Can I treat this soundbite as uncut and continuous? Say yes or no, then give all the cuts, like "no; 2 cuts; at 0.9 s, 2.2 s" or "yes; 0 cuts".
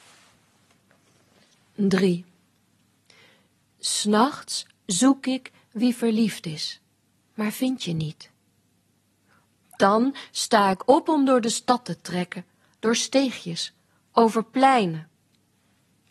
yes; 0 cuts